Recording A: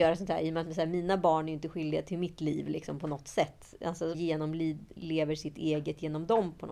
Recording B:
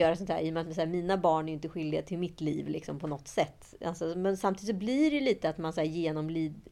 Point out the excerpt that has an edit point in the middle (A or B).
A